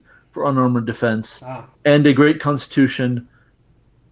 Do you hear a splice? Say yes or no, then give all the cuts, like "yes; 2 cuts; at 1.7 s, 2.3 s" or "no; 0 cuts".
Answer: yes; 1 cut; at 1.7 s